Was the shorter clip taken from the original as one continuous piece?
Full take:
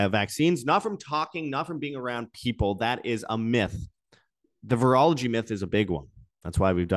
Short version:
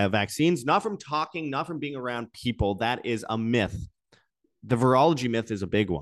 yes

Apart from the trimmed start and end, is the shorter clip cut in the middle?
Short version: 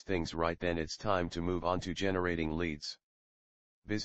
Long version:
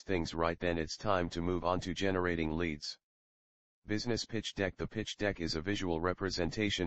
no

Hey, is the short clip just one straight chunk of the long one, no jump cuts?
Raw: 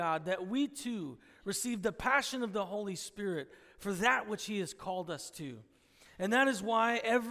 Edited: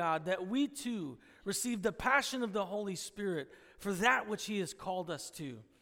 yes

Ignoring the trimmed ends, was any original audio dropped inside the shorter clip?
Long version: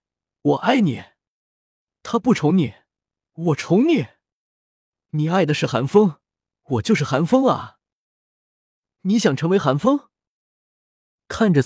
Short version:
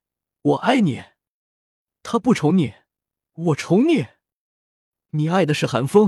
no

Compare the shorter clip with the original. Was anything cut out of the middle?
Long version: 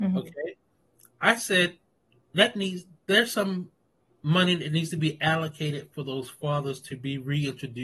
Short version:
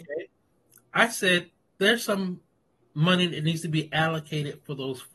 yes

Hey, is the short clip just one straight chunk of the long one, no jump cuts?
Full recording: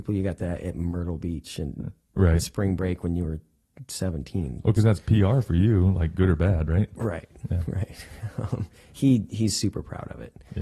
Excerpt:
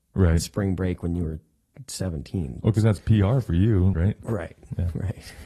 no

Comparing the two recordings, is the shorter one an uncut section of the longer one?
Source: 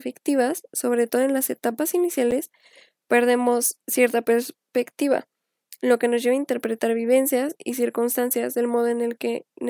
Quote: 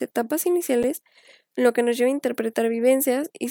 no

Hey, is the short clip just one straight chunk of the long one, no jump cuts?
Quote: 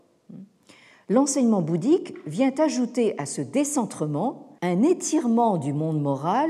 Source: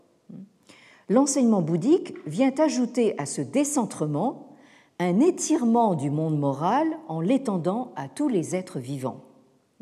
no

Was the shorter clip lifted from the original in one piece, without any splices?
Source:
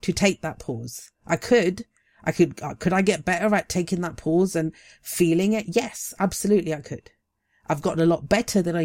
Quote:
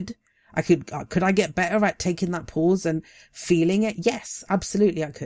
yes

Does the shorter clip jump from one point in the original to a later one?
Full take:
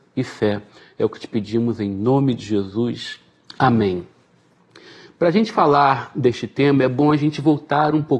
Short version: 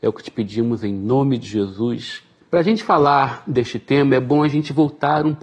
yes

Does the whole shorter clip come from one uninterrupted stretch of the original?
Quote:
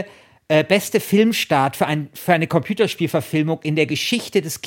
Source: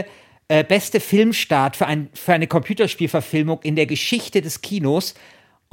yes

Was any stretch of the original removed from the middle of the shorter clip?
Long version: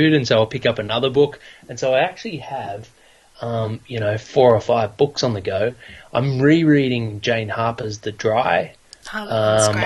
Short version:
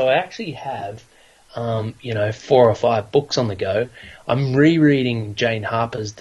no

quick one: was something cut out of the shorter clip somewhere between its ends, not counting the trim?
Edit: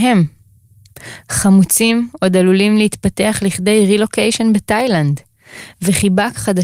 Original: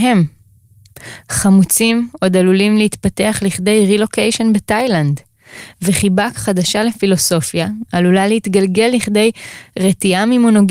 no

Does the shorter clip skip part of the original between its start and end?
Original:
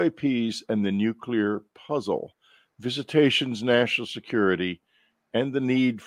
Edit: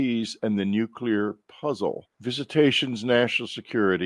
yes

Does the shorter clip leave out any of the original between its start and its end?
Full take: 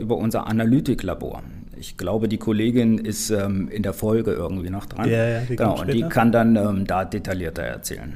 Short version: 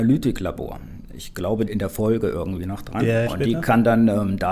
yes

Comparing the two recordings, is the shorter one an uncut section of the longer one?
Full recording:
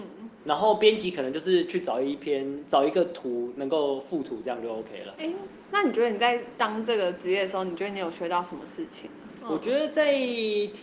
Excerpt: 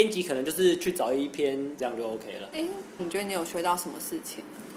no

